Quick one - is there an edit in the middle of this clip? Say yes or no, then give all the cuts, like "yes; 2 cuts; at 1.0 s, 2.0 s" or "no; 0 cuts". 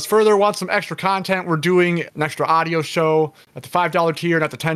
yes; 1 cut; at 2.1 s